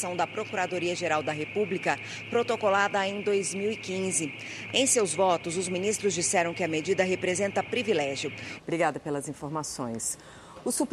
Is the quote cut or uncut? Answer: cut